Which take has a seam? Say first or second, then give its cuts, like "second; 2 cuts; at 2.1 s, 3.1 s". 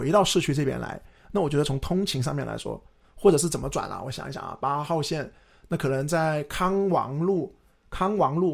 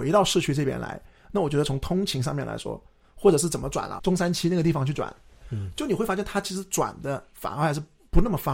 second; 2 cuts; at 4.0 s, 5.4 s